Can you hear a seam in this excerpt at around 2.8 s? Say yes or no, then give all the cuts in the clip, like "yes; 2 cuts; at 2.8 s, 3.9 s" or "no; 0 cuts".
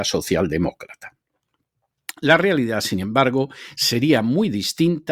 no; 0 cuts